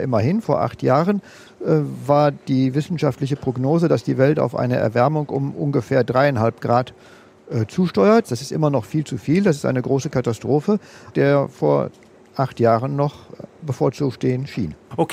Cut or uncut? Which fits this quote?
cut